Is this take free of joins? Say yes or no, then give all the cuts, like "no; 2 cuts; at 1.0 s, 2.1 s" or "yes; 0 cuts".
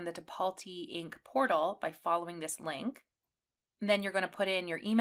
yes; 0 cuts